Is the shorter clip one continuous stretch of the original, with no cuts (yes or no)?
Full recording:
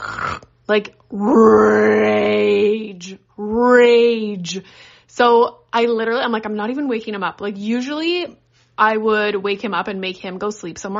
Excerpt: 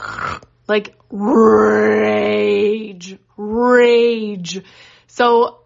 yes